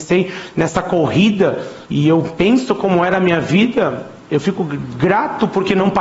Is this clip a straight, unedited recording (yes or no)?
no